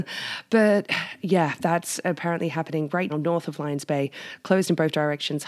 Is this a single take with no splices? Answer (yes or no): no